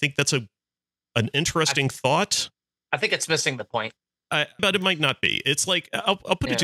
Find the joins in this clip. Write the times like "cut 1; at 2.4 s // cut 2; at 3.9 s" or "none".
cut 1; at 4.6 s